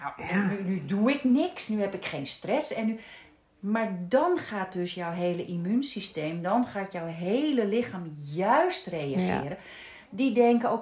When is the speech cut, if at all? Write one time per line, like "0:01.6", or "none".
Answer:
none